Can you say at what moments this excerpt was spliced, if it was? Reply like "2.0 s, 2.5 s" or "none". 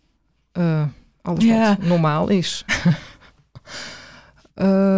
2.7 s